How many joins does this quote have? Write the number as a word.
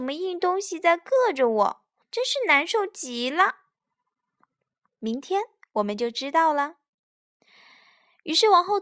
two